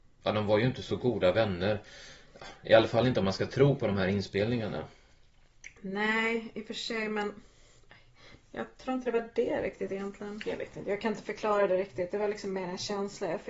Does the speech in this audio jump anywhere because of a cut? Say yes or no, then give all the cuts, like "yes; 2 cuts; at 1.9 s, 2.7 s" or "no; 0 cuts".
yes; 1 cut; at 10.4 s